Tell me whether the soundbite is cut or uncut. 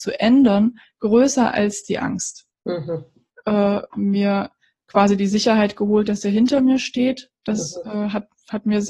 cut